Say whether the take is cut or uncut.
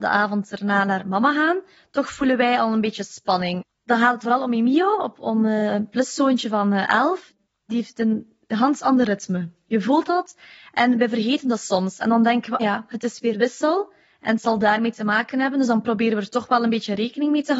cut